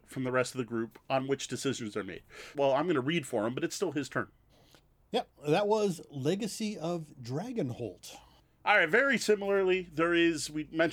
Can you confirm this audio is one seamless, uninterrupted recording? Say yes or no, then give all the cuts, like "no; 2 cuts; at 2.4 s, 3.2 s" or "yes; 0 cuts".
no; 1 cut; at 2.5 s